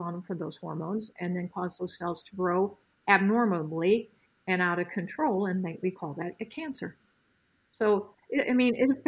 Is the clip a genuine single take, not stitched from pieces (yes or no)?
yes